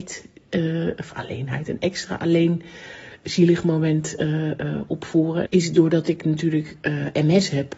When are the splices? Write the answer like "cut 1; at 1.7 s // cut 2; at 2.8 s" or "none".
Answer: cut 1; at 5.4 s